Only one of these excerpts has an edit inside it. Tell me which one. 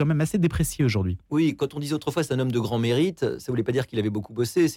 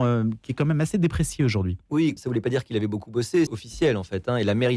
second; 2 cuts; at 2.2 s, 3.5 s

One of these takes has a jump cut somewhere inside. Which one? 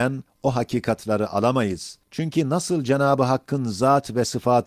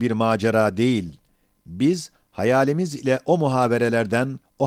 first; 1 cut; at 2.0 s

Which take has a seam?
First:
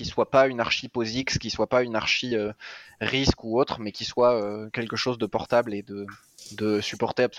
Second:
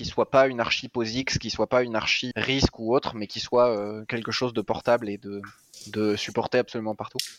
second; 1 cut; at 2.3 s

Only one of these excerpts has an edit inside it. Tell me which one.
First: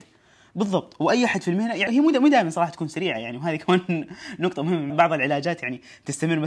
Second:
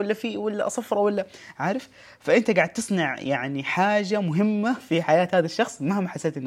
first; 2 cuts; at 1.9 s, 4.9 s

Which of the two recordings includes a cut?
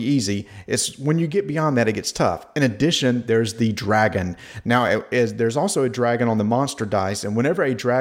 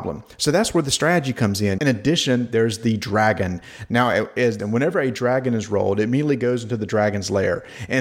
second; 2 cuts; at 1.8 s, 4.6 s

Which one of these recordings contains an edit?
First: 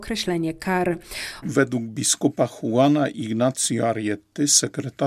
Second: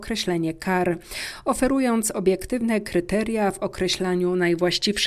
first; 1 cut; at 1.4 s

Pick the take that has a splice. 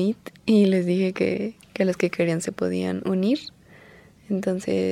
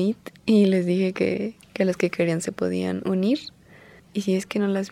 second; 1 cut; at 4.0 s

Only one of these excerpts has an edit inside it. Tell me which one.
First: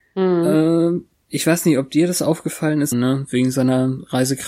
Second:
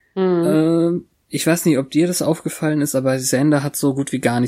first; 1 cut; at 2.9 s

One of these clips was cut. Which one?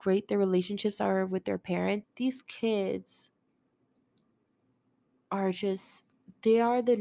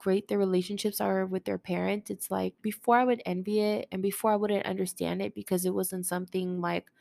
first; 1 cut; at 2.0 s

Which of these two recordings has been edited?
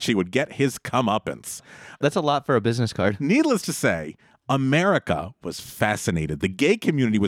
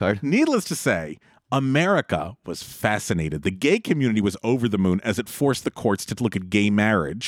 first; 1 cut; at 2.0 s

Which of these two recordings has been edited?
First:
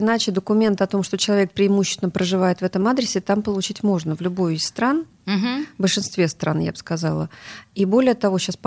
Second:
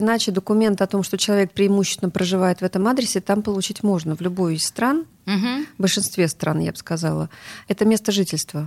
second; 1 cut; at 7.6 s

